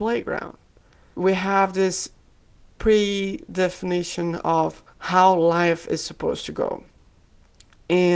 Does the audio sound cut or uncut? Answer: cut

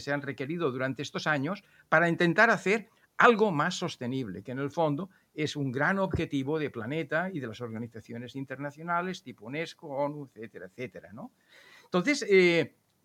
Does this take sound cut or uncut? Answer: uncut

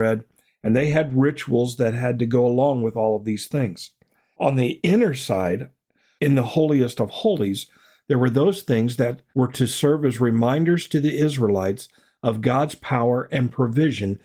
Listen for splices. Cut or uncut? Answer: uncut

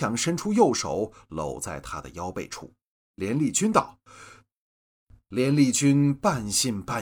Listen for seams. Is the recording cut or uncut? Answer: cut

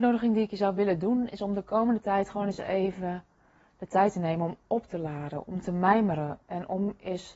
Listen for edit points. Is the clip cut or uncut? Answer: uncut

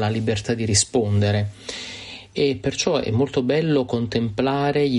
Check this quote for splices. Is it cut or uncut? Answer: uncut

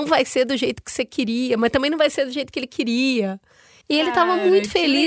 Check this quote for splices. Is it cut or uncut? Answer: cut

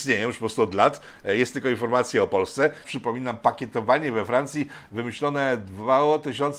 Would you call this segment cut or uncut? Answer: cut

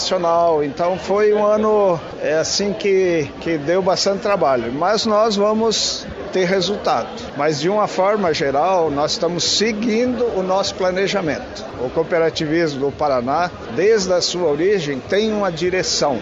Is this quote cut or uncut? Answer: uncut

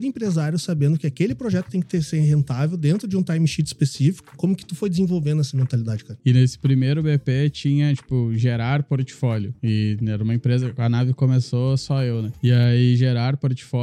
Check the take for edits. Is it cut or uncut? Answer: cut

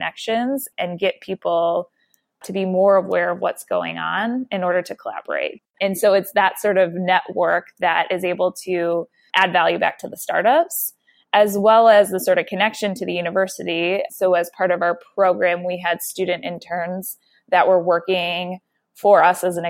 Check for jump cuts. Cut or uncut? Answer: cut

